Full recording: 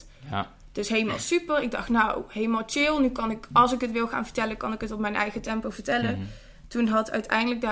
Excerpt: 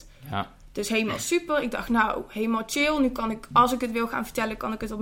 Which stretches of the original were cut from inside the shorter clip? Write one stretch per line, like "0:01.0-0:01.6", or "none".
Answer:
none